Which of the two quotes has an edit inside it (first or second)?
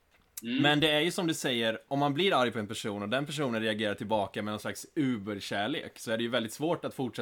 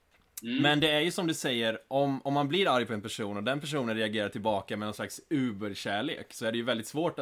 first